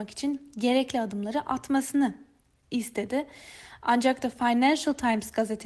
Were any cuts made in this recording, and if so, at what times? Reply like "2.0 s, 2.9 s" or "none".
none